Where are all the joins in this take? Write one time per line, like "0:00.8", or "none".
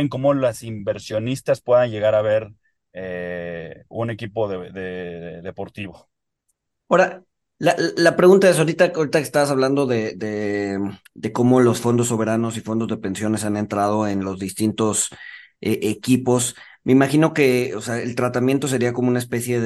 0:11.0